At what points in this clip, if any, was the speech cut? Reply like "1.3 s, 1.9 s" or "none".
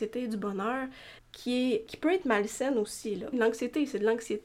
1.2 s, 3.3 s